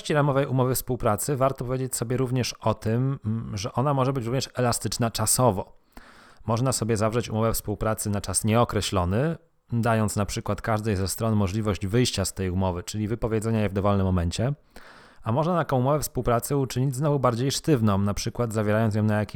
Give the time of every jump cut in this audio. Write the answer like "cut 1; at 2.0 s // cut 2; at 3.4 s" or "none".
none